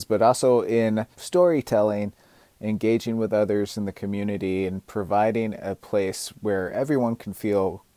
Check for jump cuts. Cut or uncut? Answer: uncut